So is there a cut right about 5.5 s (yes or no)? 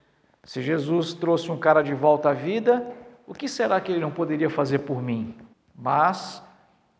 yes